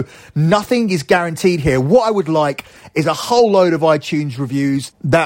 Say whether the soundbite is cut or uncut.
uncut